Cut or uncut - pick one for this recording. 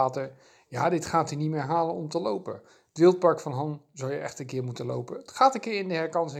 uncut